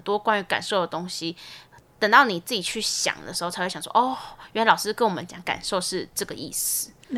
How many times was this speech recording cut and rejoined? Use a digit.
0